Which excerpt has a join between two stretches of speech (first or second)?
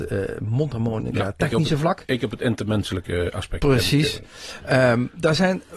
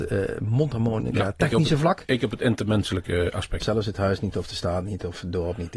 second